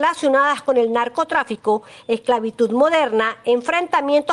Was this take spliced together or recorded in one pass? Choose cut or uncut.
uncut